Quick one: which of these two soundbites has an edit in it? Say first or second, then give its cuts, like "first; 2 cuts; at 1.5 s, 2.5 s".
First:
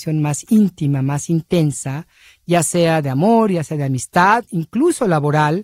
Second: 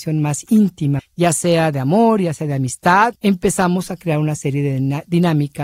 second; 2 cuts; at 1.0 s, 3.2 s